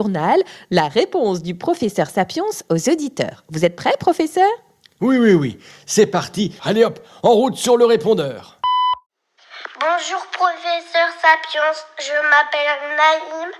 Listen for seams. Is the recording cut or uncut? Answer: cut